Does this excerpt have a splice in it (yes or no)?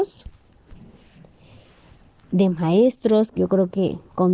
yes